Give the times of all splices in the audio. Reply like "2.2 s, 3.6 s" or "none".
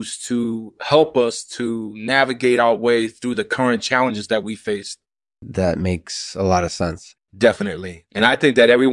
7.1 s